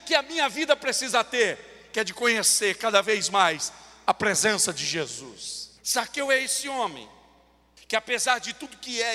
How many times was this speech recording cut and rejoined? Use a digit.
2